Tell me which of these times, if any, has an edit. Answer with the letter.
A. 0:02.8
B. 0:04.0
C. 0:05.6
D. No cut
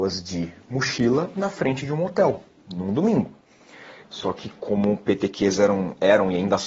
B